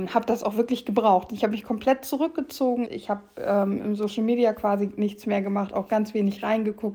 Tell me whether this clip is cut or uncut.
cut